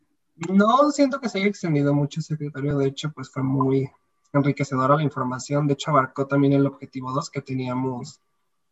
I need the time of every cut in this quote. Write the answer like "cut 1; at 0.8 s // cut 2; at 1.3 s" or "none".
none

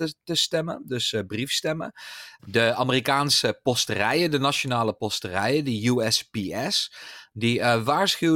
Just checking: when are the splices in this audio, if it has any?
cut 1; at 2.4 s

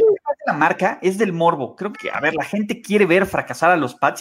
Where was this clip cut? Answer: cut 1; at 1.9 s

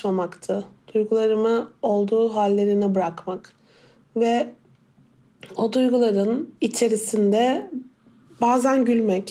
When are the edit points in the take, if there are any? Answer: cut 1; at 6.6 s

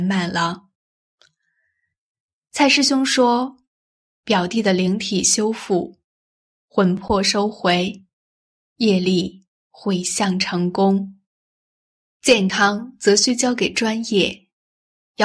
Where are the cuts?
none

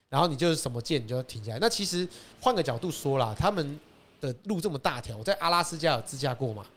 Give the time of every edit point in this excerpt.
cut 1; at 2.3 s

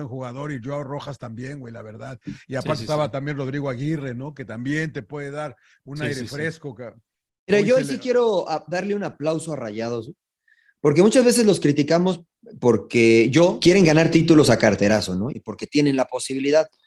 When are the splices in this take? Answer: cut 1; at 13.6 s // cut 2; at 15.3 s

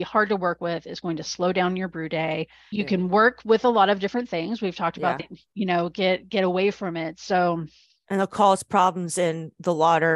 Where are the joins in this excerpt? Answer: cut 1; at 2.7 s // cut 2; at 5.2 s

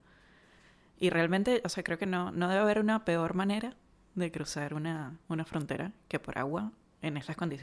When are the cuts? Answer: none

